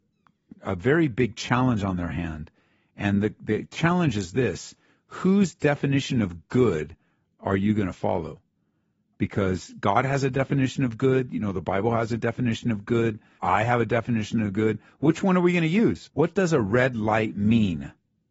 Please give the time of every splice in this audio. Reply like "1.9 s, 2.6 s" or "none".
13.4 s, 16.1 s